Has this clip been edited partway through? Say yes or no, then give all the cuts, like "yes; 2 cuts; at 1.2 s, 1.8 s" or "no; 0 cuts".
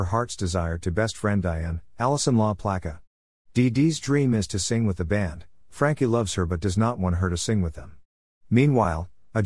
no; 0 cuts